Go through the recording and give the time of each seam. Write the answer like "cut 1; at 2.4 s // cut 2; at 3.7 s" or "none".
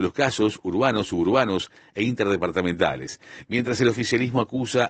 cut 1; at 3.4 s